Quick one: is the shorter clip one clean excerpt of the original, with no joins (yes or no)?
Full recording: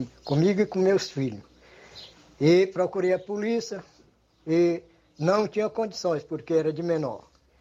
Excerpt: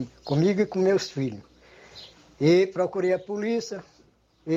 yes